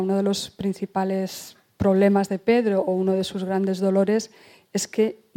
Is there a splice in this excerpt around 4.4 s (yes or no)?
no